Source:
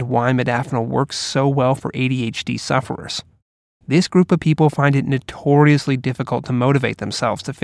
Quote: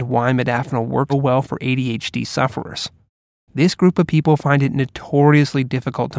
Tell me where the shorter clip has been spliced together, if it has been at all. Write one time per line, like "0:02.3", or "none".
0:01.1